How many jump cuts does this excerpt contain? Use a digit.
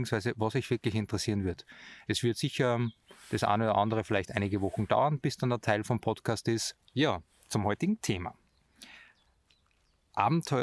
1